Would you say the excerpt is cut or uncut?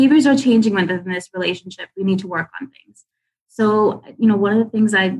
uncut